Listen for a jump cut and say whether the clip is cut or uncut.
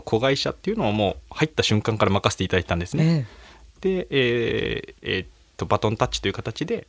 cut